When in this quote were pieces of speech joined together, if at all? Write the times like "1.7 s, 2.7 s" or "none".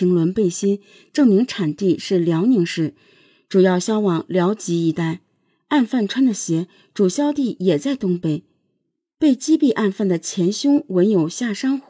none